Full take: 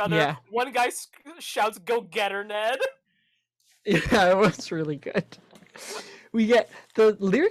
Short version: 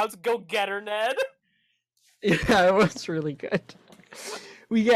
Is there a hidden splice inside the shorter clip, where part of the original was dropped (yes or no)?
no